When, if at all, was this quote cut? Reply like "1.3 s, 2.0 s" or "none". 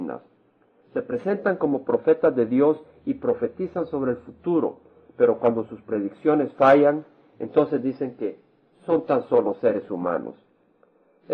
none